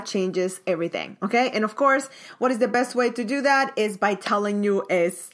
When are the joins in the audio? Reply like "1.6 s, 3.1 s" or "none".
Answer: none